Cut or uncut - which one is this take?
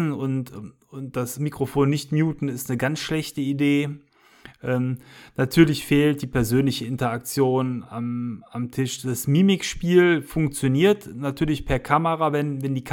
uncut